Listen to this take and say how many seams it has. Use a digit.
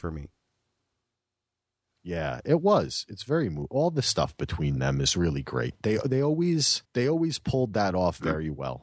1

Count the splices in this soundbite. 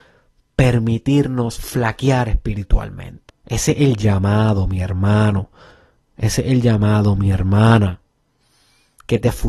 1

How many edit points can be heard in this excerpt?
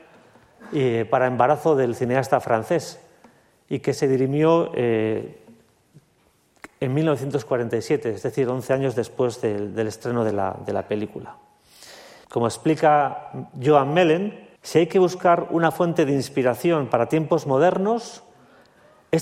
2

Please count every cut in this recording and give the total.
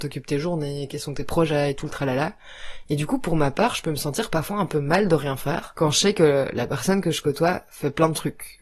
0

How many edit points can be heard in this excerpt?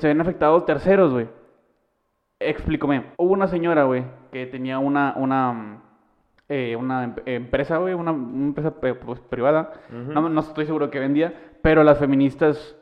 1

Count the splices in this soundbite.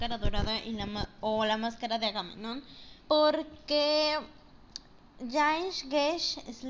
1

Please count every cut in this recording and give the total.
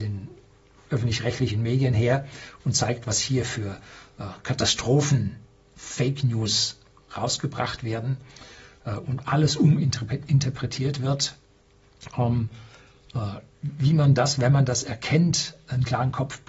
0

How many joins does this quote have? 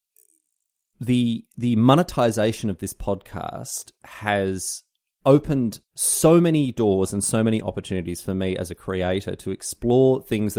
1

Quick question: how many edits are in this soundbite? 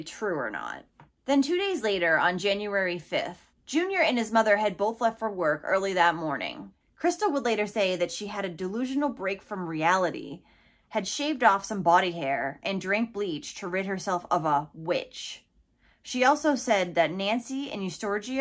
1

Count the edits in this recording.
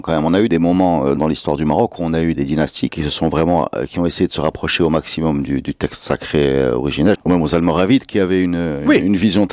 2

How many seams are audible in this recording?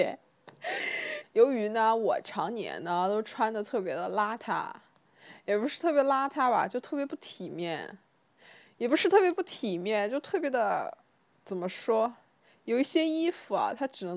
1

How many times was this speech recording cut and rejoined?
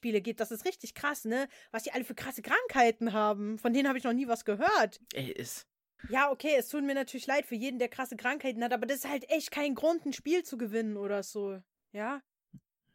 1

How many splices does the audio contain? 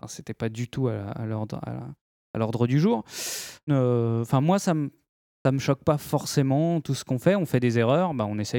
1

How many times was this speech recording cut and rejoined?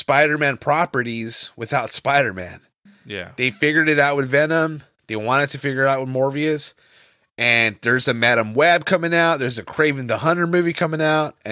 0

